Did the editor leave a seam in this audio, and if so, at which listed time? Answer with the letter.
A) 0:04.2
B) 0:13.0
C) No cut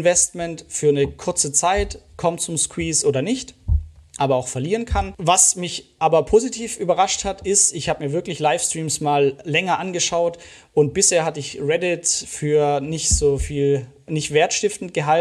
A